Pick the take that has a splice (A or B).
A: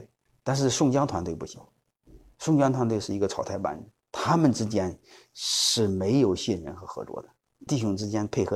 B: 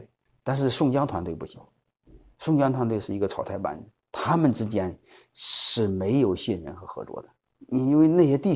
A